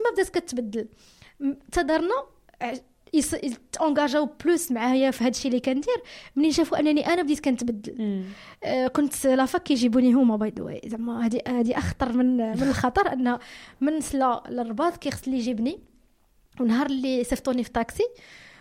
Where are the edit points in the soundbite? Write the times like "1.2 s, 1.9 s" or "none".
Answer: none